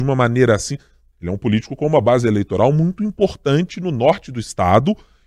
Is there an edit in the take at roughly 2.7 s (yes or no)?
no